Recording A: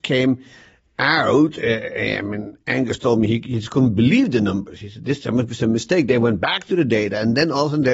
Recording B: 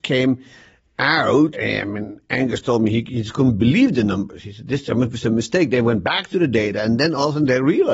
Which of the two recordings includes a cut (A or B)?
B